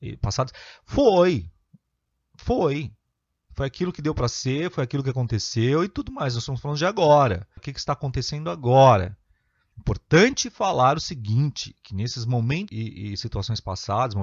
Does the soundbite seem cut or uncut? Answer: cut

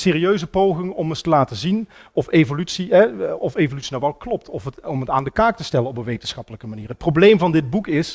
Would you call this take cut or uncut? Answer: cut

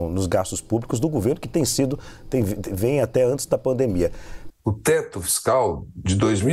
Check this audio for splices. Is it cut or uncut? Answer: cut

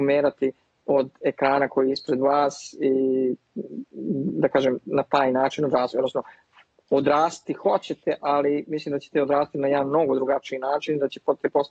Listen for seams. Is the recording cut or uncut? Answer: uncut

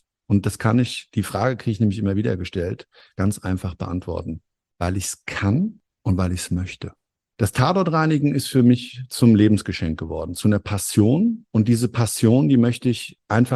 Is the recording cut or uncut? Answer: uncut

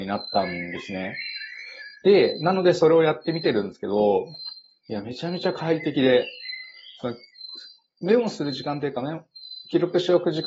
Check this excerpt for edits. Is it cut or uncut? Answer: uncut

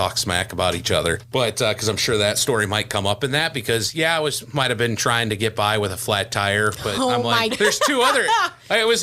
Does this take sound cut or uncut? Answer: cut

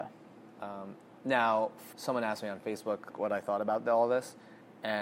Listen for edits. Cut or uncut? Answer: cut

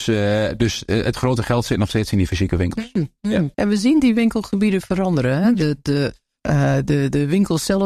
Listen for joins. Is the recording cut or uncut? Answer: cut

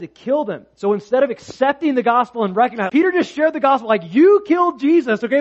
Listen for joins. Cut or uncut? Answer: cut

